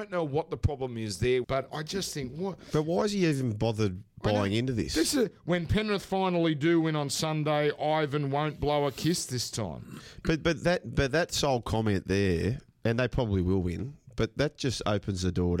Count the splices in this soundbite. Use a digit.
1